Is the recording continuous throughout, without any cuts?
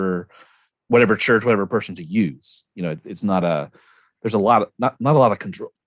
yes; 0 cuts

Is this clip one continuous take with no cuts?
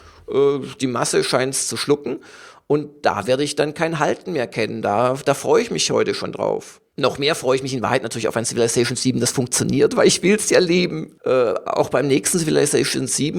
no; 1 cut; at 11.2 s

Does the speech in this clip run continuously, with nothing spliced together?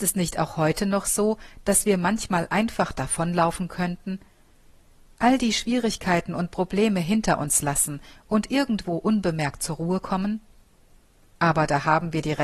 yes; 0 cuts

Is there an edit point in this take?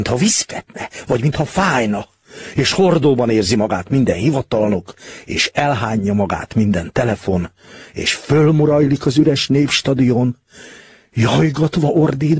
no; 0 cuts

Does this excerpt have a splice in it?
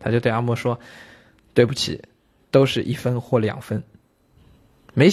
no; 0 cuts

